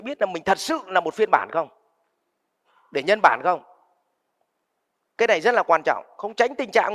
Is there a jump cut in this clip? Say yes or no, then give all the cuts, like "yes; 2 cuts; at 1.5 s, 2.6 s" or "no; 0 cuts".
no; 0 cuts